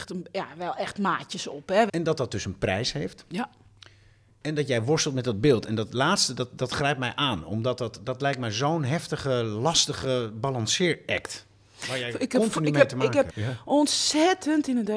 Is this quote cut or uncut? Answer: cut